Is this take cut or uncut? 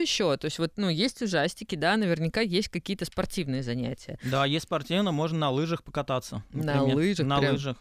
uncut